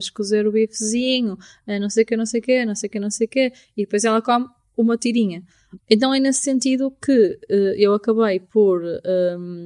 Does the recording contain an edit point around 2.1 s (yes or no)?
no